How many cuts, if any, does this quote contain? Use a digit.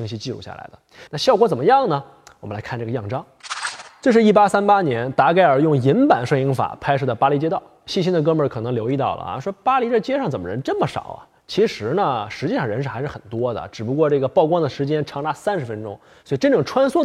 1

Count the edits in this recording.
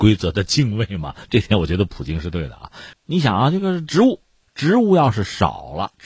1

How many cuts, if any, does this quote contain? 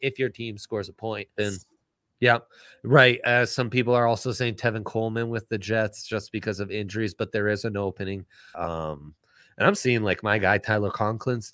3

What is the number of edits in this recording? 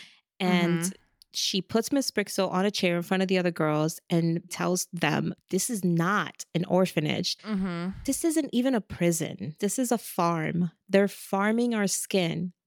1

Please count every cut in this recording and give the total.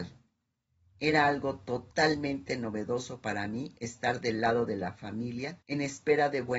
1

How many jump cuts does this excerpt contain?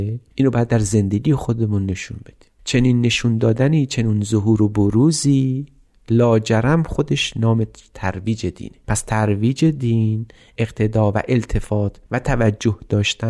1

